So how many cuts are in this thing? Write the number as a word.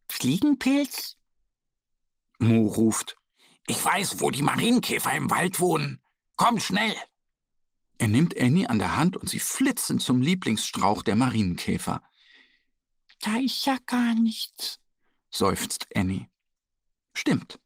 zero